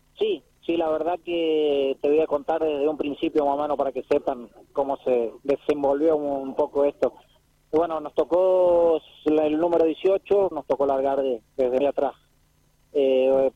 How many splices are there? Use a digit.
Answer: 2